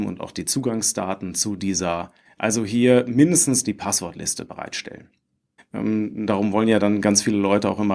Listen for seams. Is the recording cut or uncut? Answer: cut